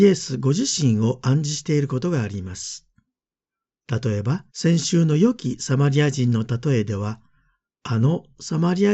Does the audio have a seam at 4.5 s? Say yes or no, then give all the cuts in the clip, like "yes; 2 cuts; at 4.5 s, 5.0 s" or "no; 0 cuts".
yes; 1 cut; at 4.5 s